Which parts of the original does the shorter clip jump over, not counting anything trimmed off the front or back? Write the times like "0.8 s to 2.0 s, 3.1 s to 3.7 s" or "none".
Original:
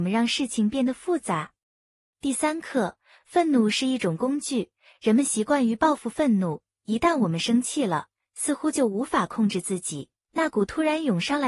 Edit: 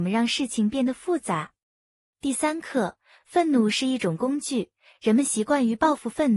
none

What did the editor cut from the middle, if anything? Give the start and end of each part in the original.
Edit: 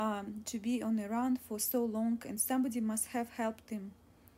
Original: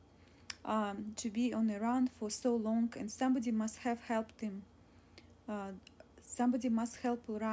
none

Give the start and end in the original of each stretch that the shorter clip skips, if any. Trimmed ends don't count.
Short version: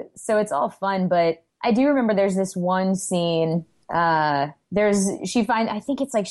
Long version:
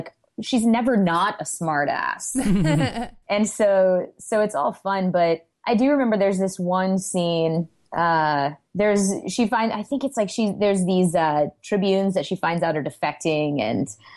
none

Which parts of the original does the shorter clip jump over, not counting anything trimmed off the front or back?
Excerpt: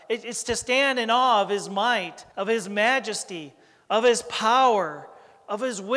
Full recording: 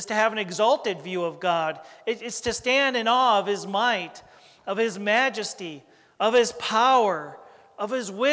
4.3 s to 4.6 s

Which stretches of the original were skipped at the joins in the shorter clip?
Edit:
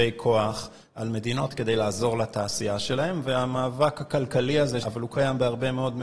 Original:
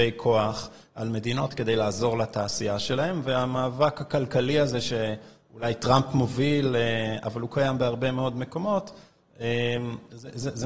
4.8 s to 7.2 s

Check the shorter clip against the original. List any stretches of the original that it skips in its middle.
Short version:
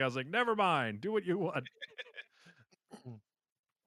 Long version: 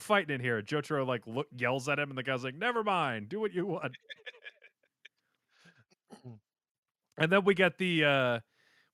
4.5 s to 5.5 s

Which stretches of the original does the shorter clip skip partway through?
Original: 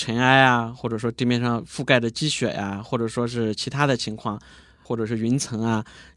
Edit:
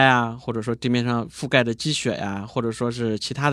none

